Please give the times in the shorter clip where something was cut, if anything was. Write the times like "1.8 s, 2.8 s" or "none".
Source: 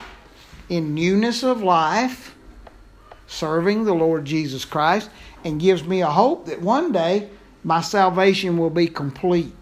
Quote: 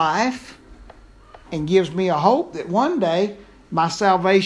1.4 s